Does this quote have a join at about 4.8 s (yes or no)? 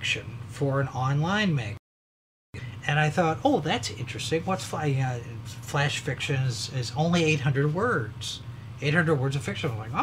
no